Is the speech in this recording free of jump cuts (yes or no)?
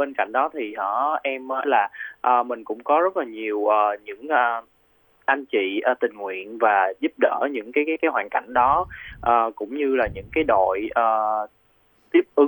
no